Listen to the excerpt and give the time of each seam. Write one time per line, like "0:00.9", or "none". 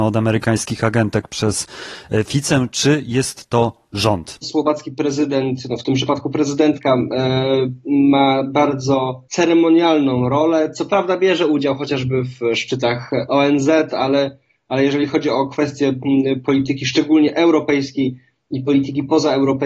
0:04.4